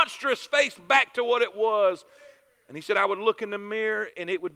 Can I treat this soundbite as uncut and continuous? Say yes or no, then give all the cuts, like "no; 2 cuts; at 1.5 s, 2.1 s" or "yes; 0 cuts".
yes; 0 cuts